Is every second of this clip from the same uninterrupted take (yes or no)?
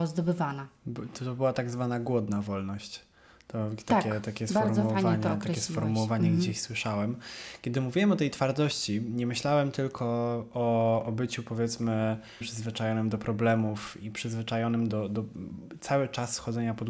no